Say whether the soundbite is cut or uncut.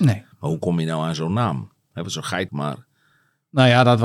cut